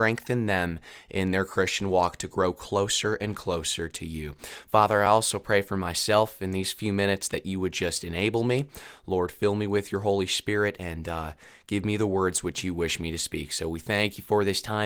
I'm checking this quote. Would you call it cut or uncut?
uncut